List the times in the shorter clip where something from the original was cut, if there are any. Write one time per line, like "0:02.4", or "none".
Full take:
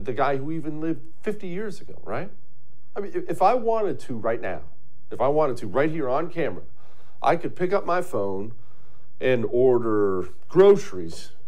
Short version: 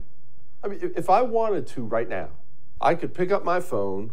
0:02.8